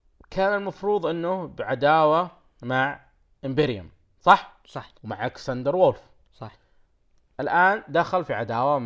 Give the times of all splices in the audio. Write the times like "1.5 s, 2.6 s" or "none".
4.9 s